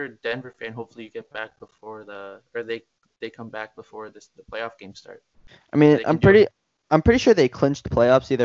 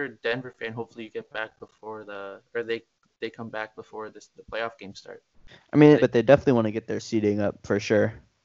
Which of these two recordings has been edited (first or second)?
second